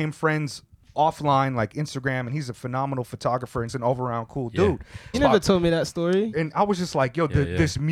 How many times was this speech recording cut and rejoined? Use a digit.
3